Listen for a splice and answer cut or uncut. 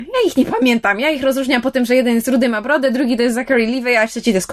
uncut